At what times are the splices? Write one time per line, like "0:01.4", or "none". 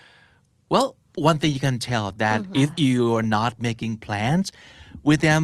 0:02.5